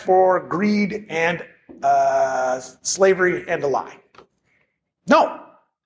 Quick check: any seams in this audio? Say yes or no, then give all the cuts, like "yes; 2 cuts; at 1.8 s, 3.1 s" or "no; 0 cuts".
no; 0 cuts